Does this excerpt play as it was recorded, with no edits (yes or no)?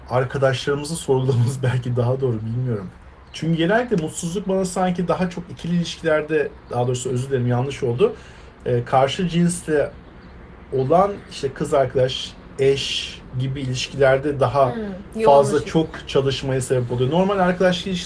yes